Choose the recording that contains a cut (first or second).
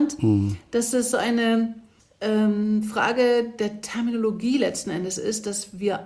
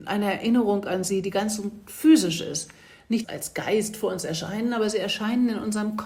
second